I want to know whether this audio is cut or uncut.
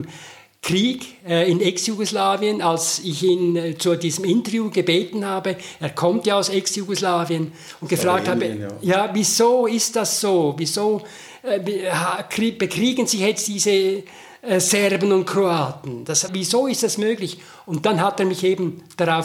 cut